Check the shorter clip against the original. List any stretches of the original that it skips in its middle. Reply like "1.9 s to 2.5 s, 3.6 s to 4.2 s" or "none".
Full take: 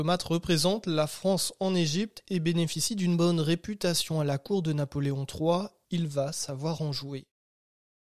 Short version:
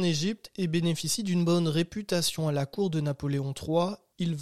none